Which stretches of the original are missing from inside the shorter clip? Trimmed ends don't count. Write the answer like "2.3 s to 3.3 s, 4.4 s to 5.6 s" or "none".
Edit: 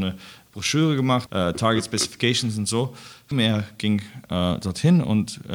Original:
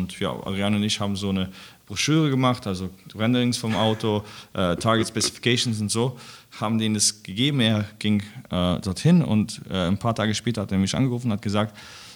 2.6 s to 4.5 s, 6.5 s to 7.5 s